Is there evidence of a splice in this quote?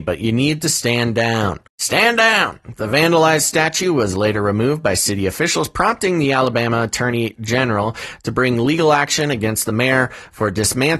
yes; 1 cut; at 1.7 s

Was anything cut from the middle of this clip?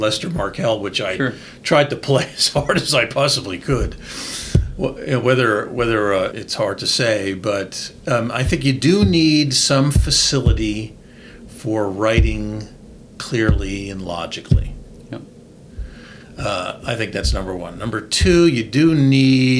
yes; 1 cut; at 6.3 s

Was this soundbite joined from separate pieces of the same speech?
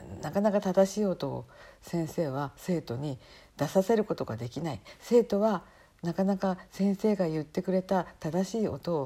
no; 0 cuts

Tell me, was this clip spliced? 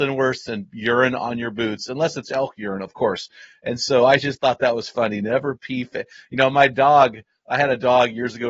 no; 0 cuts

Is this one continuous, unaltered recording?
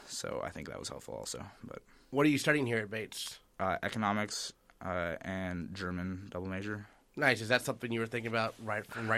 yes; 0 cuts

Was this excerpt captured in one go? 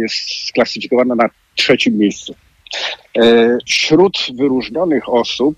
no; 1 cut; at 3.7 s

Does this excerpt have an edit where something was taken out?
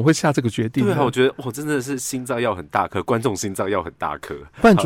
no; 0 cuts

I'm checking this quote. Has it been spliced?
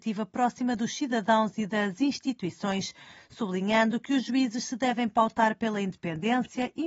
no; 0 cuts

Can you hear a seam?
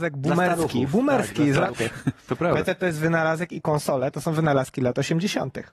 yes; 1 cut; at 1.7 s

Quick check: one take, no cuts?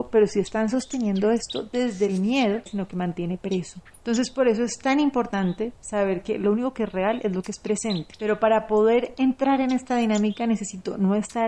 no; 2 cuts; at 2.7 s, 8.2 s

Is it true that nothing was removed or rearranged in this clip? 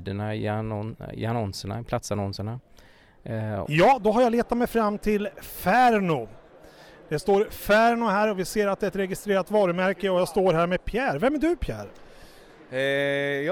no; 1 cut; at 3.6 s

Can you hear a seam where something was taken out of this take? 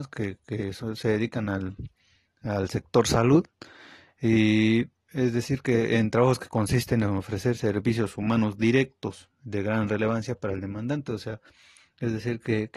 no; 0 cuts

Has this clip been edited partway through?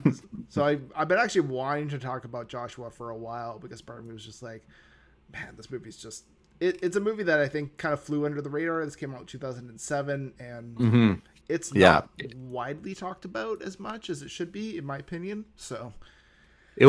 no; 0 cuts

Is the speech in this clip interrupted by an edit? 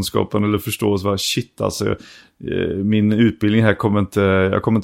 no; 0 cuts

